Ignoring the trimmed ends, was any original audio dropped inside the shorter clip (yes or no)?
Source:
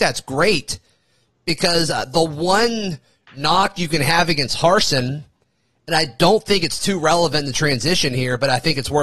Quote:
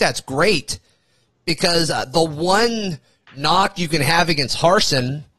no